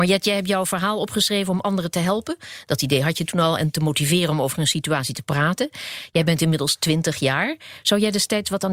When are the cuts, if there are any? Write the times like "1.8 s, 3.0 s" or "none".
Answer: none